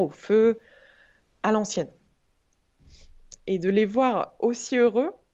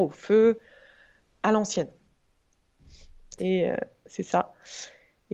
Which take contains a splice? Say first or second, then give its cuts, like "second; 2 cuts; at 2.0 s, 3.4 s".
second; 1 cut; at 3.4 s